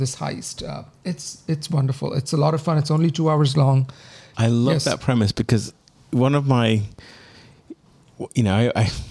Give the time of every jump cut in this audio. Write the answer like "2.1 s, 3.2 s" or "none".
4.3 s